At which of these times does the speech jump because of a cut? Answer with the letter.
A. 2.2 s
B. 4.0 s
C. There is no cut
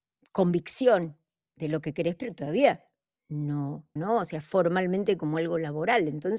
B